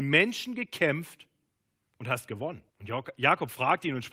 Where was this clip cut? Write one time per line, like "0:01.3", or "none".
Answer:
0:02.7

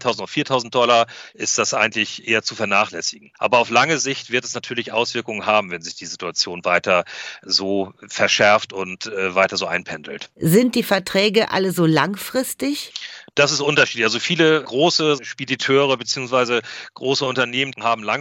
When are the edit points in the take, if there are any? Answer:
none

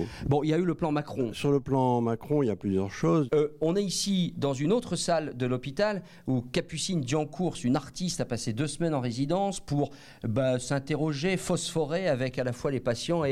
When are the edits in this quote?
0:03.3

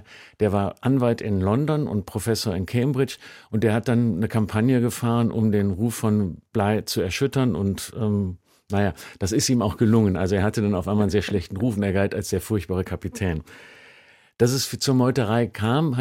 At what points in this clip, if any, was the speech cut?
none

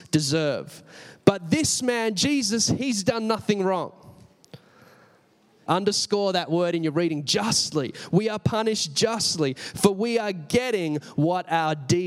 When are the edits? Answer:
0:05.7

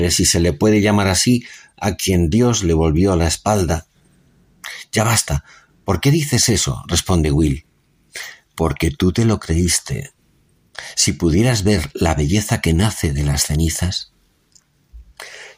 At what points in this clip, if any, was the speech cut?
none

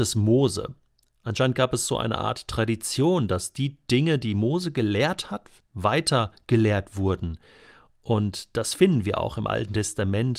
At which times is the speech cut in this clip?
none

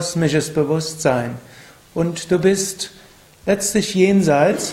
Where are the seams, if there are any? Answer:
none

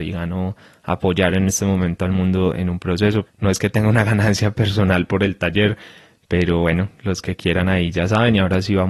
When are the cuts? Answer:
0:03.3

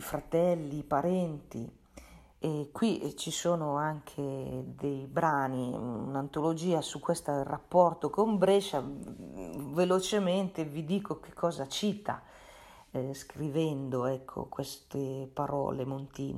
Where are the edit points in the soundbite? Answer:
0:02.3

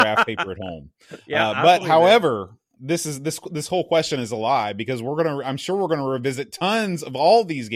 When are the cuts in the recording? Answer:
none

